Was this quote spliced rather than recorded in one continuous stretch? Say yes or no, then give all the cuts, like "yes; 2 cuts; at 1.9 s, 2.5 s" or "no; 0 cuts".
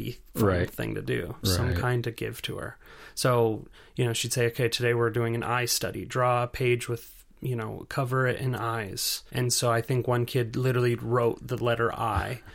yes; 2 cuts; at 1.4 s, 9.3 s